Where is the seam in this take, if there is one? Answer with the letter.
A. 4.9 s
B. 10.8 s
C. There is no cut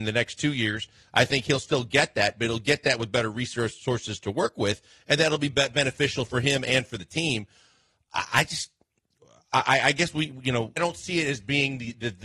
B